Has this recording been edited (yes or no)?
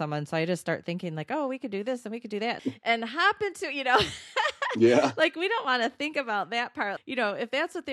yes